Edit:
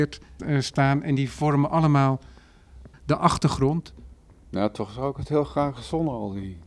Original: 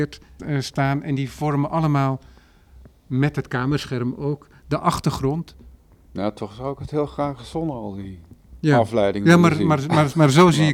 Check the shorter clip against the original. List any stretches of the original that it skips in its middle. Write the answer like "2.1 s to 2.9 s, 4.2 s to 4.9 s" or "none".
2.9 s to 4.6 s